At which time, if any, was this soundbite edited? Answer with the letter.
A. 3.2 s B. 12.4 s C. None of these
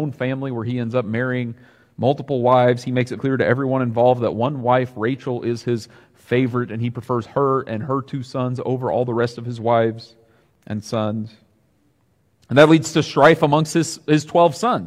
A